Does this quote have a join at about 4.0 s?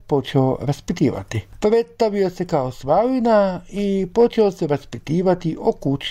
no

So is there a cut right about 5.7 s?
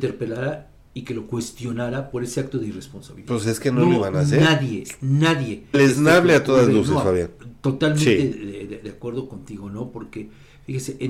yes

